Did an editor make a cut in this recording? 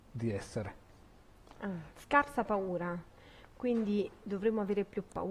yes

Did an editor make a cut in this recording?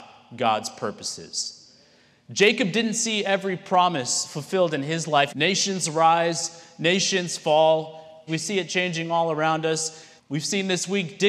yes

